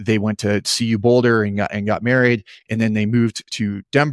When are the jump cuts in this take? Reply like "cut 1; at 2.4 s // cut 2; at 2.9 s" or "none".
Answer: none